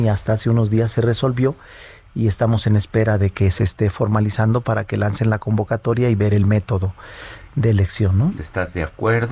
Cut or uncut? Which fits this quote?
cut